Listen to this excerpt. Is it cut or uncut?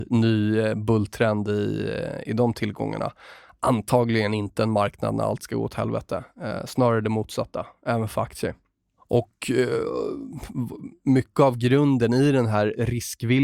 uncut